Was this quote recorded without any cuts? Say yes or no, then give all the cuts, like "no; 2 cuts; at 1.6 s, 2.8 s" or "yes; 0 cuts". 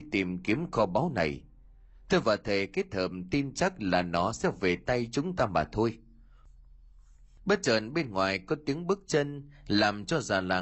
yes; 0 cuts